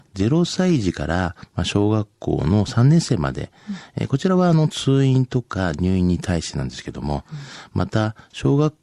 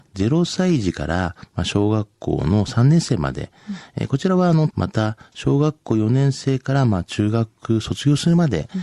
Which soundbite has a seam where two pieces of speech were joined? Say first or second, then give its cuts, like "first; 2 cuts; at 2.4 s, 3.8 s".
second; 1 cut; at 4.7 s